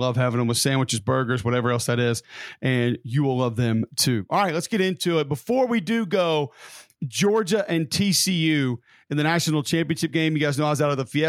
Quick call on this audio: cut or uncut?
uncut